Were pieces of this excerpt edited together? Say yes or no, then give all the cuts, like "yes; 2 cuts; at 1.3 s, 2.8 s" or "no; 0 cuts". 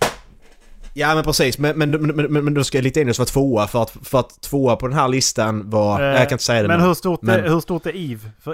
no; 0 cuts